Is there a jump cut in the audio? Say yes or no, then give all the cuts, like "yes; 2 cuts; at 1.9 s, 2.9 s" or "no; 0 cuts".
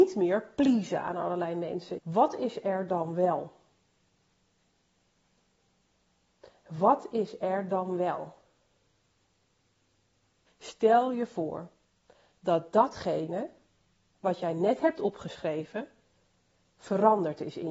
yes; 2 cuts; at 2.0 s, 10.5 s